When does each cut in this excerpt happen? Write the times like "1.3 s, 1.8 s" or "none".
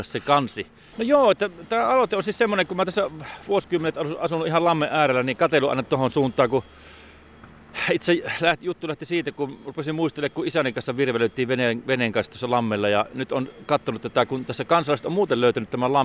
0.9 s